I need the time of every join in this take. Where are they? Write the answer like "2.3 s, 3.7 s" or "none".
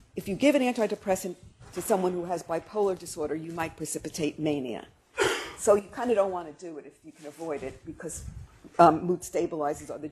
none

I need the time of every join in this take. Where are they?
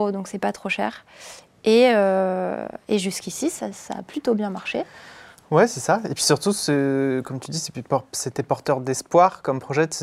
none

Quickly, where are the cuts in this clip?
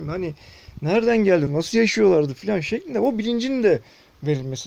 1.5 s

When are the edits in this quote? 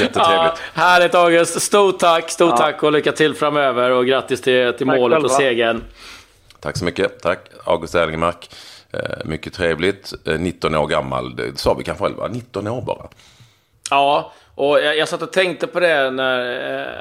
none

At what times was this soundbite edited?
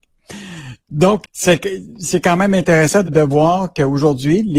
1.2 s, 3.1 s

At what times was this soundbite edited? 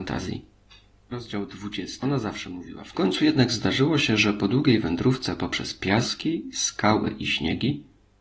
1.1 s

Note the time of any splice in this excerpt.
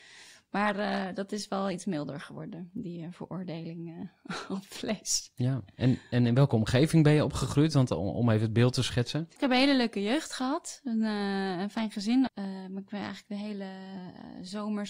9.4 s, 12.3 s

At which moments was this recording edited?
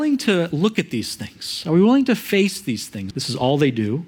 3.1 s

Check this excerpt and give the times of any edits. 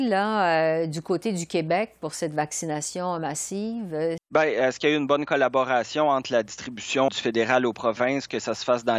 4.2 s, 7.1 s

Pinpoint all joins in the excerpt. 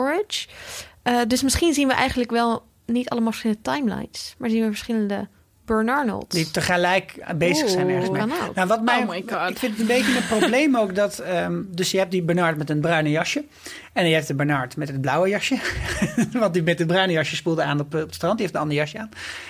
8.7 s

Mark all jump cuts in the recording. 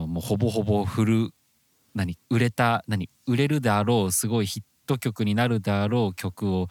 2.2 s

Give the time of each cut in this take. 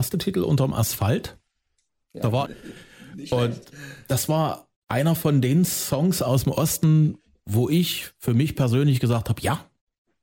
2.5 s

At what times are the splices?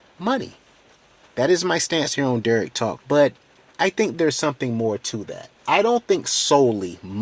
3.0 s, 5.6 s

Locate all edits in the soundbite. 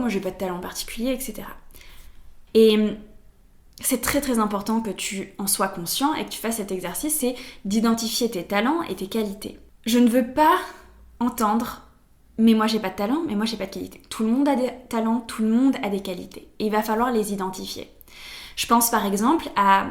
2.5 s

